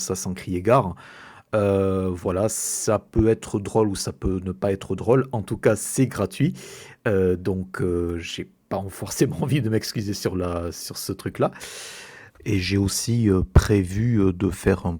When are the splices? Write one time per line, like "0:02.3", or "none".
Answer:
0:12.3